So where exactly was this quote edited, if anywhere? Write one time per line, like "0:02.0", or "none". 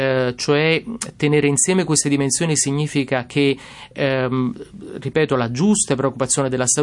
none